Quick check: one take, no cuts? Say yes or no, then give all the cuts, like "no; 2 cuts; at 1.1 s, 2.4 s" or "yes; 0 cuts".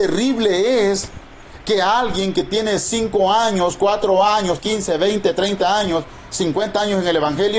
no; 1 cut; at 4.6 s